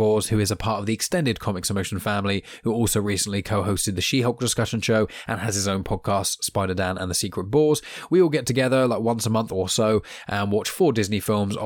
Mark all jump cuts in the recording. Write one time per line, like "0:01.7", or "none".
0:05.3

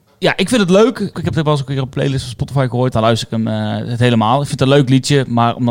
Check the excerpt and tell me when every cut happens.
0:01.1
0:02.9

